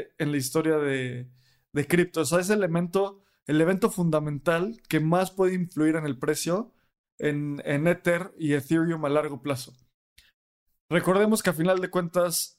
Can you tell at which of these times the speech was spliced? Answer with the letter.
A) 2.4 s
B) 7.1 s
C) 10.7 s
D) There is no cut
D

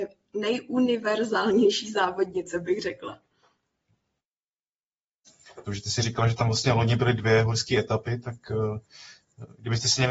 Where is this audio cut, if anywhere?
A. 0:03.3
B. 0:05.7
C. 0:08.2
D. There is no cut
B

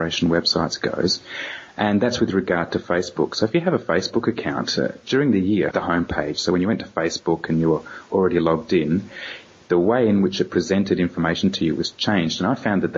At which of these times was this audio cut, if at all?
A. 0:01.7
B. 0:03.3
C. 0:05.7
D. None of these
C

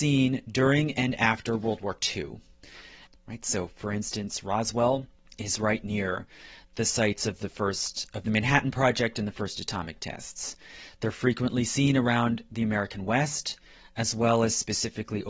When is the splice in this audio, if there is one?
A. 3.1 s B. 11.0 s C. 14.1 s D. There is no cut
A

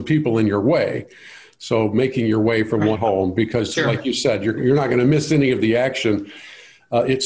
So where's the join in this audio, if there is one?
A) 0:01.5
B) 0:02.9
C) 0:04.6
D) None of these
B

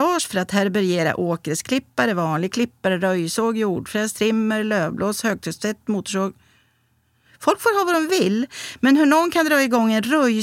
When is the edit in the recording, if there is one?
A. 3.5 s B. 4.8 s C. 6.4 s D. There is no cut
D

